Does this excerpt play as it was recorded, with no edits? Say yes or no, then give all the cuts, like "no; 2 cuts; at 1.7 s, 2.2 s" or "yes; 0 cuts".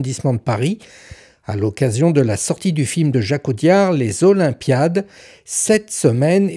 yes; 0 cuts